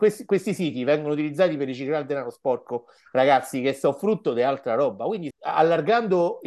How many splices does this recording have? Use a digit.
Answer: 1